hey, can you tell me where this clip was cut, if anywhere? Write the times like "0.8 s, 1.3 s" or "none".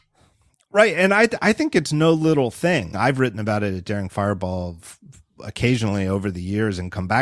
2.9 s